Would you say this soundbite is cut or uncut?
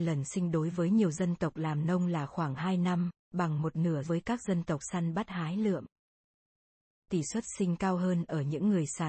cut